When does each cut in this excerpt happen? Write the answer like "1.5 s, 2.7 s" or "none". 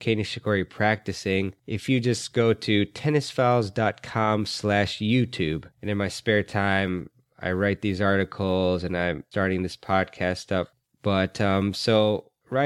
5.7 s